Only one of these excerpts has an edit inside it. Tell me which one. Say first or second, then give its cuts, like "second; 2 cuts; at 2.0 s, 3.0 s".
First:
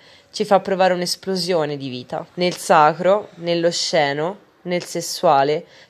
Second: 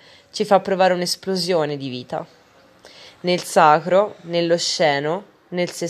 first; 1 cut; at 2.3 s